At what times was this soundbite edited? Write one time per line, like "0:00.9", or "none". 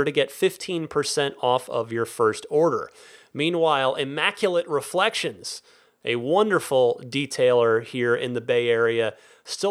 none